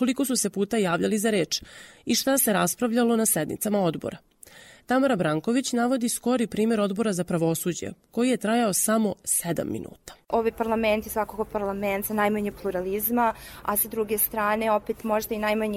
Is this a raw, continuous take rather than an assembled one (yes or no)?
yes